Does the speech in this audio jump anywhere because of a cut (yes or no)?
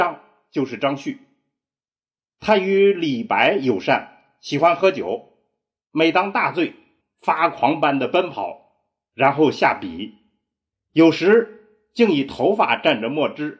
yes